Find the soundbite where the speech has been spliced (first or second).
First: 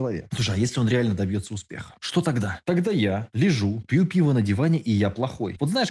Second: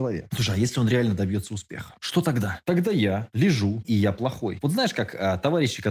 second